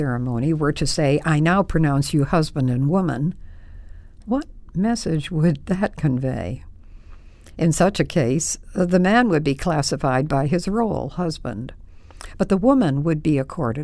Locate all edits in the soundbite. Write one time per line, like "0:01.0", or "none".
none